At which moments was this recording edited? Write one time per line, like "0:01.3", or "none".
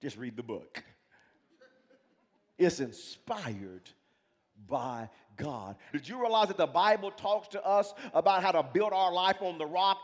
0:05.9

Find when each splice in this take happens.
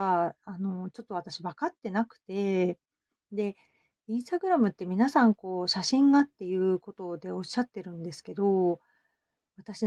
none

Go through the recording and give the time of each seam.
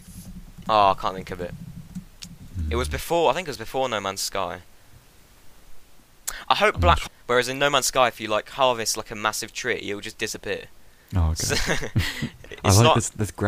0:07.1

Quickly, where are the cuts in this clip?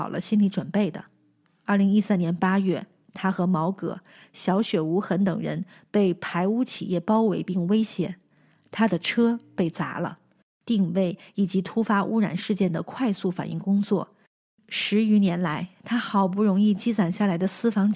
0:10.5

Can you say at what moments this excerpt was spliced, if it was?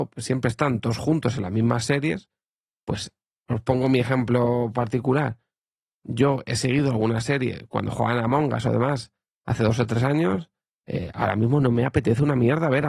none

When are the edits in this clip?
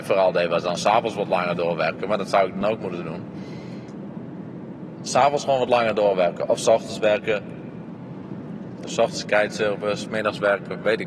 0:08.8

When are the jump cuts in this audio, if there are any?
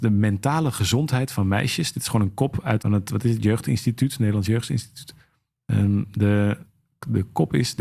0:02.8

